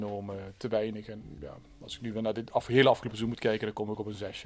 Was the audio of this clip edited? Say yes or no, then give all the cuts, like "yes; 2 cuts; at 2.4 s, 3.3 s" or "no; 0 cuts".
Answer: no; 0 cuts